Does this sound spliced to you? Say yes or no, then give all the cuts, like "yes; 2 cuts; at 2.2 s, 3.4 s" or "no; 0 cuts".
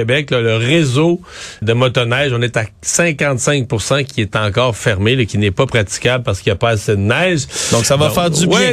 yes; 1 cut; at 1.6 s